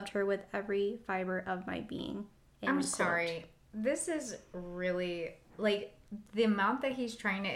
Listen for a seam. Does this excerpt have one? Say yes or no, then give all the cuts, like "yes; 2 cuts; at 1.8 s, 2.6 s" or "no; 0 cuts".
no; 0 cuts